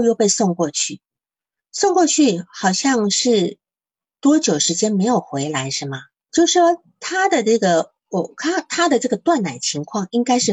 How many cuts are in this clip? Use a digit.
1